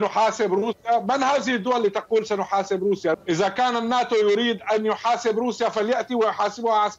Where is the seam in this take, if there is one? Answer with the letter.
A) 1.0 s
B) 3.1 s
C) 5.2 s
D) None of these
B